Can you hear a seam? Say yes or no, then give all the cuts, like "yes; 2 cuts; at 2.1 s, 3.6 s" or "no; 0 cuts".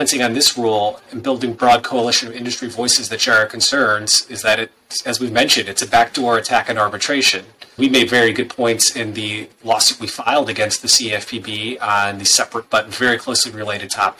yes; 1 cut; at 7.8 s